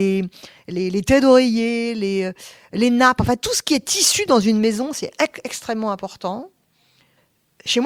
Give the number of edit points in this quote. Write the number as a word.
zero